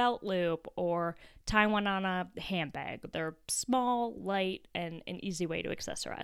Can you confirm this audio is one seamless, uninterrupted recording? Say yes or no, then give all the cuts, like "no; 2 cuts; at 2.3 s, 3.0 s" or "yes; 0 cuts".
yes; 0 cuts